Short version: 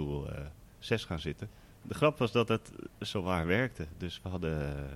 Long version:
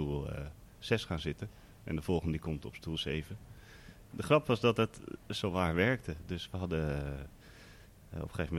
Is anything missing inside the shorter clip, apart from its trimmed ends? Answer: yes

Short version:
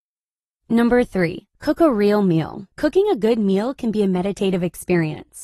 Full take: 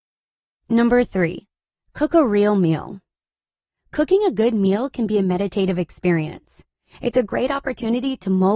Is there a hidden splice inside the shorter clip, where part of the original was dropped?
yes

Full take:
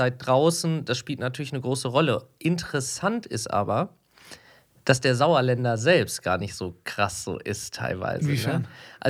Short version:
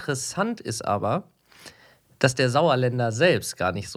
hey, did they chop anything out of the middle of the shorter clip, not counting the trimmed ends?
no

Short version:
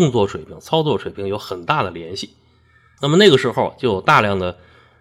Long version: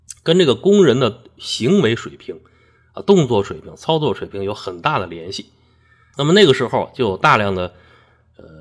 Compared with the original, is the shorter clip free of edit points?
yes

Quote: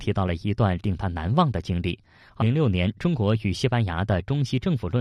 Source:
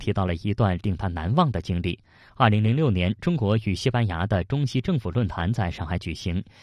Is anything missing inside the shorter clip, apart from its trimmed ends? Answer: yes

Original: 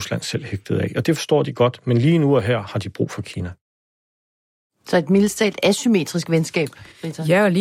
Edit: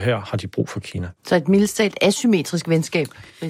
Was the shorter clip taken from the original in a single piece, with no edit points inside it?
no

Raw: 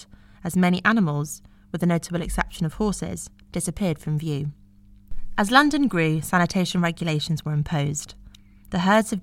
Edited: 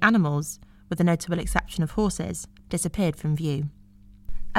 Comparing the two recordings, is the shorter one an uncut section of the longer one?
yes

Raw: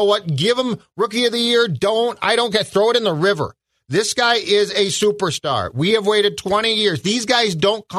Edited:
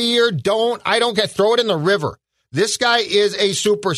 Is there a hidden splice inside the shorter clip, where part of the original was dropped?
no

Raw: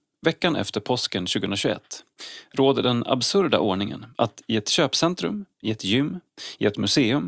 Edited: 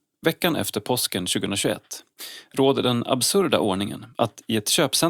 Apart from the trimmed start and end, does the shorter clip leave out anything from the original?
no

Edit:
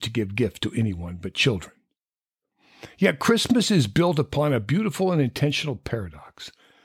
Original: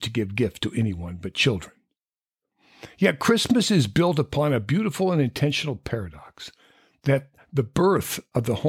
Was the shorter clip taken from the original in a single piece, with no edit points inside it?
yes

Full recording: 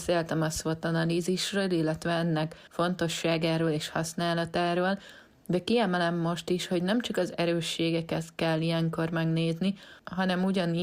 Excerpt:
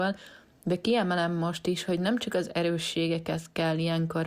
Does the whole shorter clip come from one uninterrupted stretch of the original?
yes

